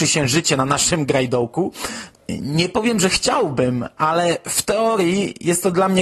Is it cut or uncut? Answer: cut